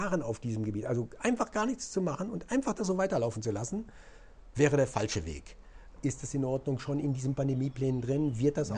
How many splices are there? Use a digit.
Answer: 1